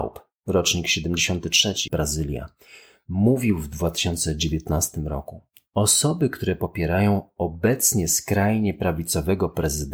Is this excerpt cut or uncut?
cut